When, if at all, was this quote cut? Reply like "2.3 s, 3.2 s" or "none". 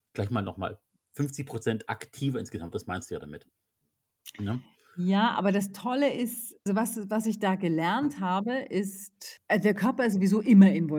6.7 s